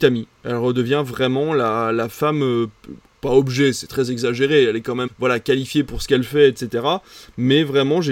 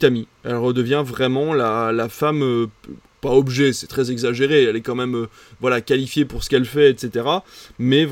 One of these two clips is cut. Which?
first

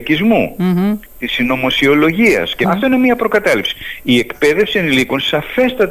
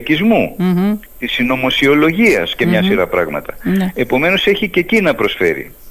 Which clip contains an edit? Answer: first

